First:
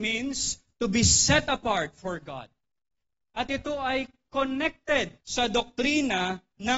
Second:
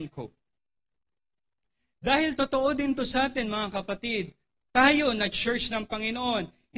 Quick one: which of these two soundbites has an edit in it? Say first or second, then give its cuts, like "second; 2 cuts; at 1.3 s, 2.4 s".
first; 2 cuts; at 3.2 s, 5.2 s